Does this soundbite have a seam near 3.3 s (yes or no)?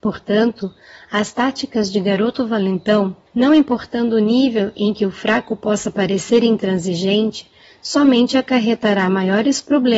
yes